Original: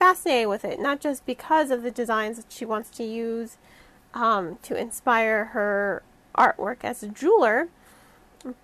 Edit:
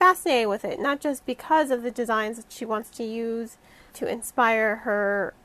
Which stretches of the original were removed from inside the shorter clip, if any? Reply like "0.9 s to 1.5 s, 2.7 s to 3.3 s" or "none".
3.9 s to 4.6 s